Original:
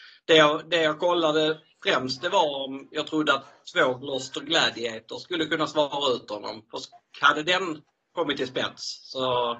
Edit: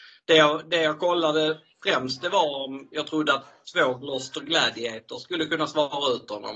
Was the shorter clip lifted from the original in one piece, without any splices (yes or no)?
yes